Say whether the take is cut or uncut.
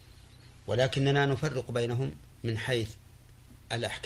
cut